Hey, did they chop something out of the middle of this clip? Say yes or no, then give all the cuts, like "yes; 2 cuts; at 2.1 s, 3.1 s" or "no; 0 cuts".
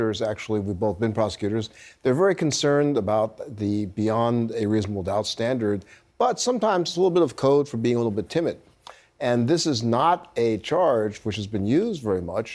no; 0 cuts